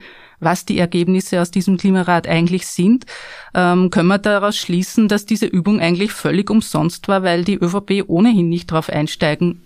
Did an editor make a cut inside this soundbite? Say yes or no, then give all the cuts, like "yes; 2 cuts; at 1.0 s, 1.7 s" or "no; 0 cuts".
no; 0 cuts